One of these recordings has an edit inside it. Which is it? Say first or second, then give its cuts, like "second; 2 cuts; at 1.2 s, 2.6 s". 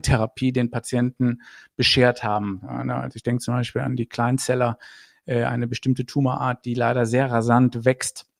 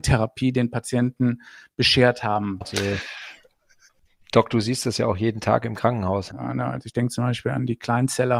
second; 2 cuts; at 2.6 s, 6.3 s